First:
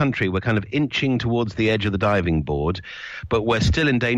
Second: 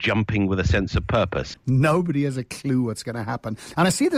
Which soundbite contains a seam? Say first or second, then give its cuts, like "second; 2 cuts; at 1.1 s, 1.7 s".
second; 1 cut; at 1.5 s